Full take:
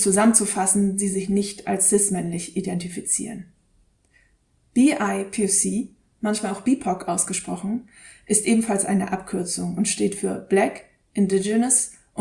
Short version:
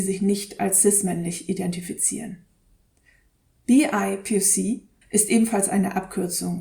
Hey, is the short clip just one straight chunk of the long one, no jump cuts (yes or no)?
no